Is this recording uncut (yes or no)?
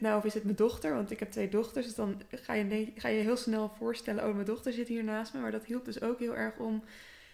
yes